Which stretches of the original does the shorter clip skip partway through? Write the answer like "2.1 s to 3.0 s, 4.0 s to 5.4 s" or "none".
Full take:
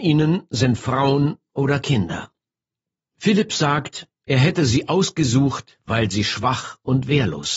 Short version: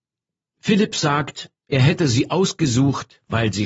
none